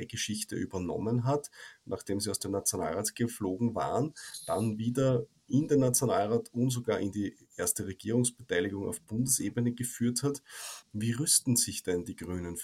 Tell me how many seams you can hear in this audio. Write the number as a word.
one